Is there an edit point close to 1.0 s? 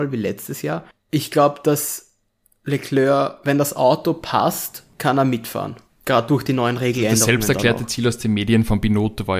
no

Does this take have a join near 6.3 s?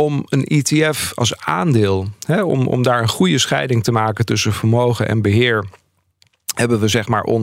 no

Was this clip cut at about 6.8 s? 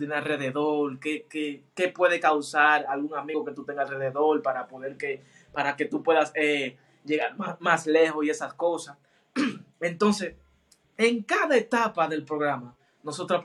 no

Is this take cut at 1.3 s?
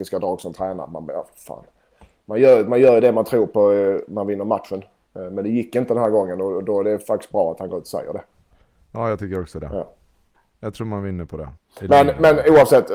no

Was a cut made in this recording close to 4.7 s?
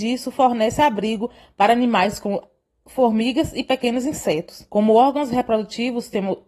yes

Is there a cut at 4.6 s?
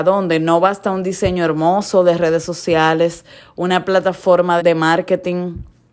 yes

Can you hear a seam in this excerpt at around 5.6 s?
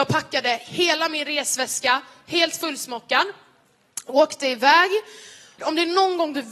yes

